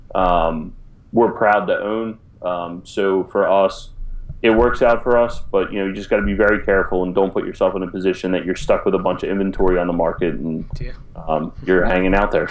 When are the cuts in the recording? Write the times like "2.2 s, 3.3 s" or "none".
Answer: none